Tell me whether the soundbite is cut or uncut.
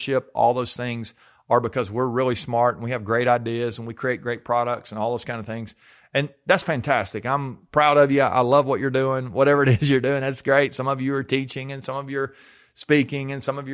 uncut